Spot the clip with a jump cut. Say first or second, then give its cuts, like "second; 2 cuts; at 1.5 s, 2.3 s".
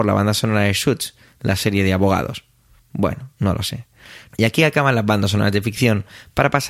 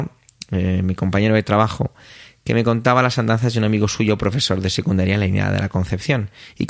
first; 1 cut; at 4.3 s